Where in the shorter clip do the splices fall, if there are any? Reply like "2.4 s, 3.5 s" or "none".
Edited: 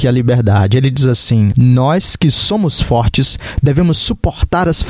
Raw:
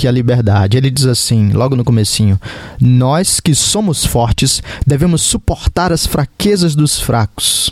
1.5 s